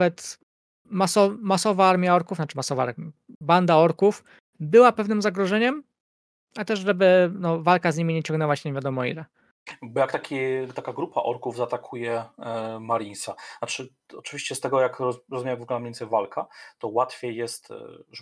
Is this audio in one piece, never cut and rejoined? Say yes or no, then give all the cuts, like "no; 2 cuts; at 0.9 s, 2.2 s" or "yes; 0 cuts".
yes; 0 cuts